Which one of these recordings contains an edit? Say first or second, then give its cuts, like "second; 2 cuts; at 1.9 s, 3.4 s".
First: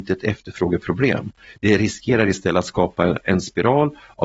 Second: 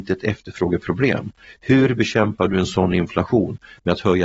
first; 1 cut; at 1.6 s